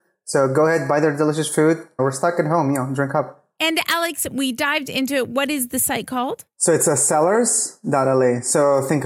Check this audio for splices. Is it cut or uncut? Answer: cut